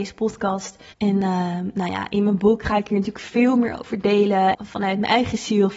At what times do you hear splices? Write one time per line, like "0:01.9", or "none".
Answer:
0:00.9
0:04.5

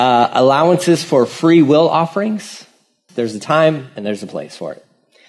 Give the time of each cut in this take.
0:03.1

